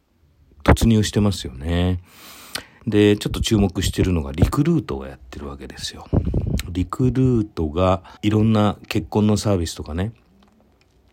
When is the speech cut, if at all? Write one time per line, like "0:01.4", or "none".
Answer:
0:02.8
0:08.2